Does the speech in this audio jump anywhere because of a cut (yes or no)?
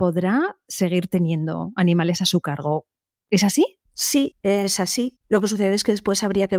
no